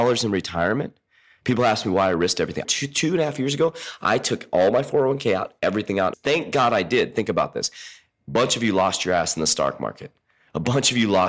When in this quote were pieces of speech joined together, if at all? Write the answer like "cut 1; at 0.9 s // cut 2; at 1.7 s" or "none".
cut 1; at 2.6 s // cut 2; at 6.1 s